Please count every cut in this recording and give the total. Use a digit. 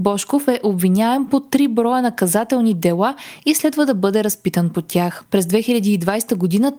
1